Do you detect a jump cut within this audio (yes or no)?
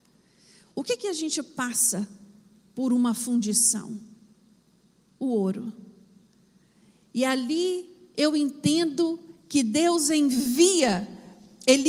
no